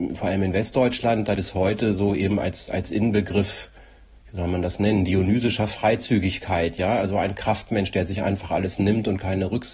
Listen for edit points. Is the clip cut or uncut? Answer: cut